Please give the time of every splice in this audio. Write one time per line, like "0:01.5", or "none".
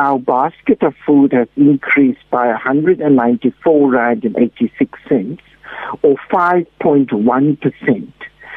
none